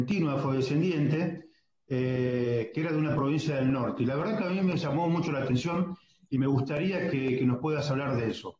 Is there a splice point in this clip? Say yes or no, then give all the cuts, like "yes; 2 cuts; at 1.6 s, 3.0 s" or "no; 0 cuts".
no; 0 cuts